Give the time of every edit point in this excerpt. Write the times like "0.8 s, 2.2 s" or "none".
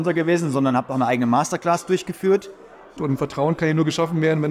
3.0 s